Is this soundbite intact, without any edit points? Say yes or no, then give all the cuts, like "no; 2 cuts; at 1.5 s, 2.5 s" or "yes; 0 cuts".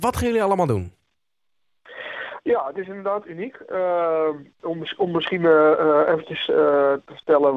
yes; 0 cuts